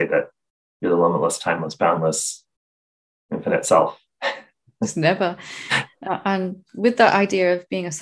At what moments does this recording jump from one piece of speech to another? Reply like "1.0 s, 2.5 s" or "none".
none